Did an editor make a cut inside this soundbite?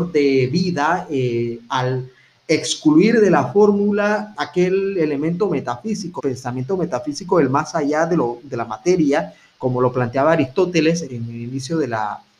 yes; 3 cuts; at 4.3 s, 6.2 s, 11.0 s

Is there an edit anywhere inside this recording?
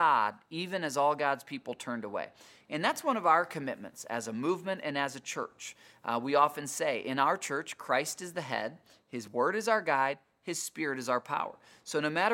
no; 0 cuts

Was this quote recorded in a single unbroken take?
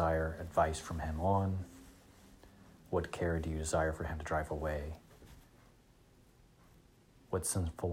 yes; 0 cuts

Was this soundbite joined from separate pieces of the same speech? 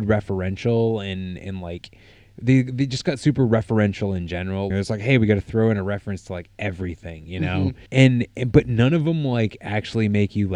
yes; 2 cuts; at 4.7 s, 7.9 s

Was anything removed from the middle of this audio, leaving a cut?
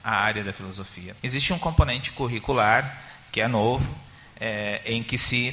yes; 1 cut; at 1.2 s

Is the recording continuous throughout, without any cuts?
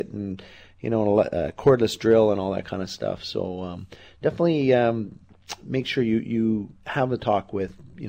yes; 0 cuts

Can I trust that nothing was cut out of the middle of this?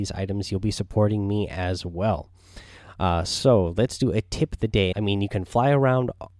no; 1 cut; at 4.9 s

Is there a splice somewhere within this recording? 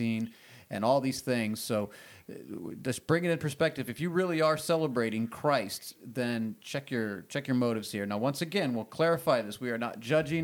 no; 0 cuts

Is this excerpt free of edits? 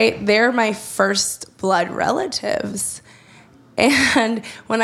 yes; 0 cuts

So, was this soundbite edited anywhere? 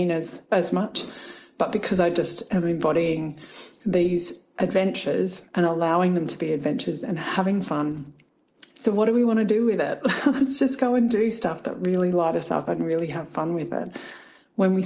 yes; 1 cut; at 8.7 s

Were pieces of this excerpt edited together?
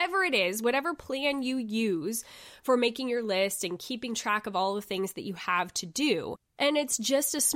yes; 1 cut; at 6.6 s

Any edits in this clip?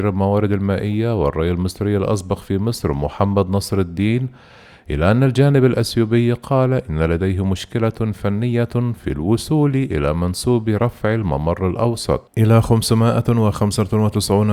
yes; 1 cut; at 12.3 s

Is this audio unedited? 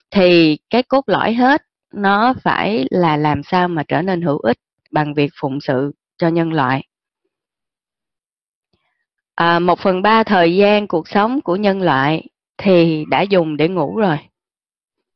no; 1 cut; at 4.8 s

